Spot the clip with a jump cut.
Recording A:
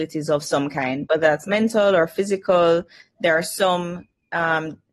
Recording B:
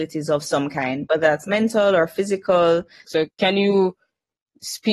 B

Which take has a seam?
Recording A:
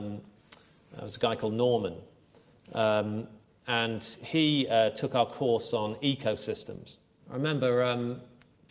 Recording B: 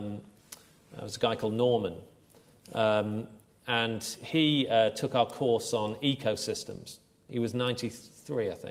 A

